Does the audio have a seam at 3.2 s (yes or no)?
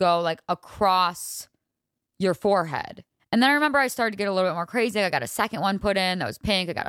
yes